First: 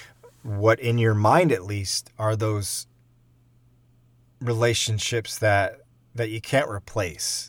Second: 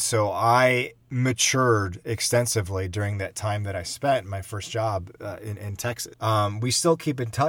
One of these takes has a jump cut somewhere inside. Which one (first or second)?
second